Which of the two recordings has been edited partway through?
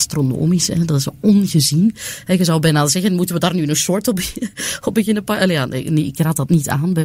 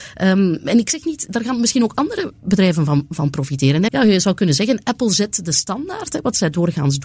second; 1 cut; at 3.9 s

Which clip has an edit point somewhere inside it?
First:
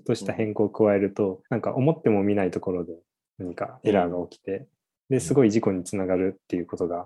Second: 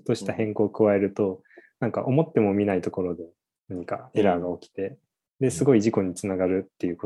first; 1 cut; at 1.5 s

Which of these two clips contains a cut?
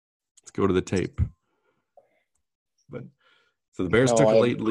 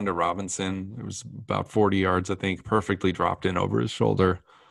first; 1 cut; at 2.9 s

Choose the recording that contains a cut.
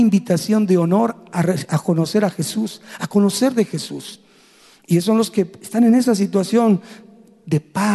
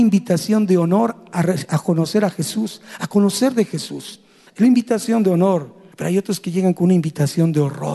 second; 2 cuts; at 4.5 s, 5.9 s

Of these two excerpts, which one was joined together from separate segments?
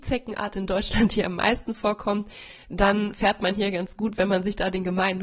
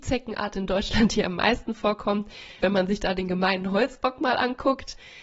second; 1 cut; at 2.6 s

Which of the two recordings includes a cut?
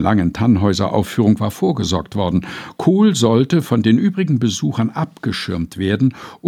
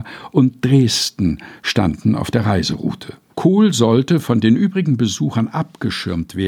second; 1 cut; at 3.3 s

